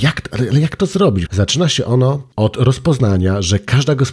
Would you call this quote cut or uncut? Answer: cut